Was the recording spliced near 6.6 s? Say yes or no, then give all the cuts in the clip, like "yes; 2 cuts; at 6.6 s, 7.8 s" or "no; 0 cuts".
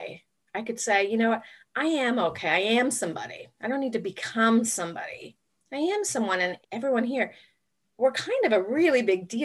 yes; 1 cut; at 6.6 s